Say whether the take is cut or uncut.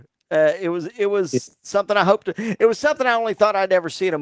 uncut